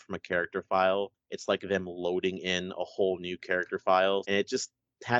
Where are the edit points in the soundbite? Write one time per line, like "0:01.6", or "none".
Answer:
0:04.2